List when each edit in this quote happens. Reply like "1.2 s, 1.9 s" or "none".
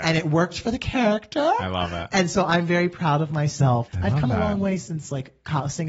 3.9 s